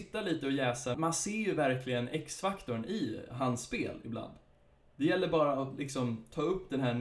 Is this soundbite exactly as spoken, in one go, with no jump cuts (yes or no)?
no